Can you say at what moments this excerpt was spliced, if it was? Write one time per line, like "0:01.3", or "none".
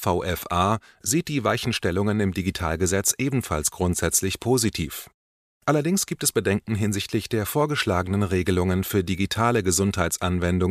none